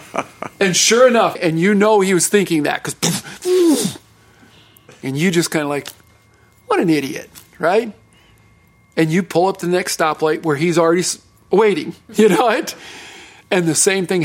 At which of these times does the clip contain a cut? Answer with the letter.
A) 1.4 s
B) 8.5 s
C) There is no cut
A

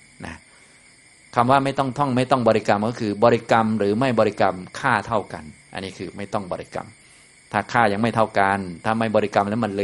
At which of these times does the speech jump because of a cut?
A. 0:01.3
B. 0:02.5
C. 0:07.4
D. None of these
D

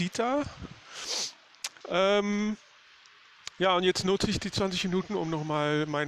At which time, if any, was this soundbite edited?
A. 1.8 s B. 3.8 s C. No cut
A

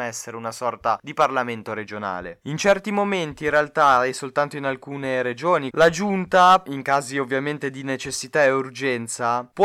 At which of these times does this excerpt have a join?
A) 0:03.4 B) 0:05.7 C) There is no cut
B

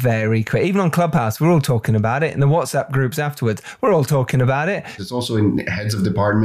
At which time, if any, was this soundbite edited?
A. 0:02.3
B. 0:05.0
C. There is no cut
B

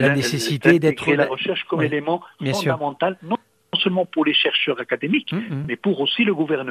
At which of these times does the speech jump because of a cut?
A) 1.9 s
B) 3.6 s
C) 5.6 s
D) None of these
D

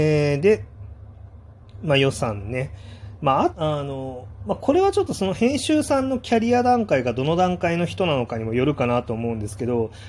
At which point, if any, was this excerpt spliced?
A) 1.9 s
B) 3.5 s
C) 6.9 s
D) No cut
B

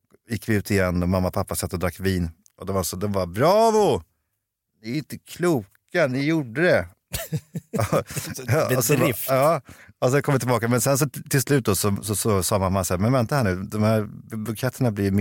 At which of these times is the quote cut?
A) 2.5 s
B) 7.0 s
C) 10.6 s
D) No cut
D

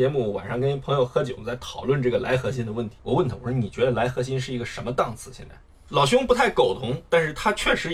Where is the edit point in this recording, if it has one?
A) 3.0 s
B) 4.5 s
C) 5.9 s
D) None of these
C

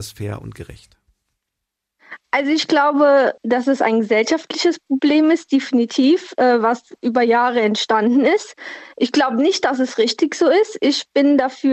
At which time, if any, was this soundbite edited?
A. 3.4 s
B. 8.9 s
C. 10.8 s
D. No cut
A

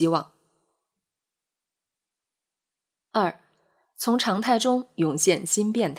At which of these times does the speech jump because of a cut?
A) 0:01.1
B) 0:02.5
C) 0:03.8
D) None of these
C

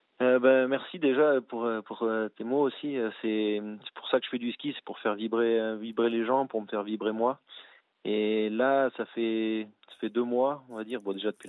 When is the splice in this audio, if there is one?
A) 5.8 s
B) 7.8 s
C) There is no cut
C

